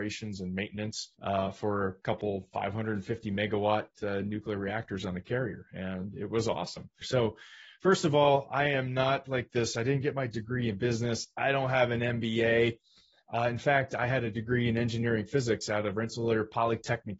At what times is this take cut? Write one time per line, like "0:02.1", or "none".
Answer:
0:01.1
0:07.0